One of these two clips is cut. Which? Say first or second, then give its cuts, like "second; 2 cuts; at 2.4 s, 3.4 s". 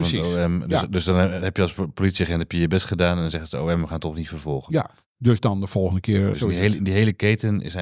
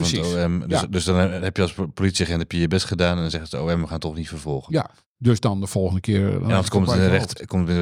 first; 1 cut; at 6.3 s